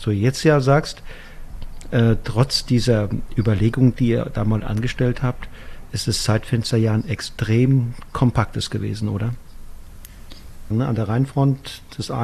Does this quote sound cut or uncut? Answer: cut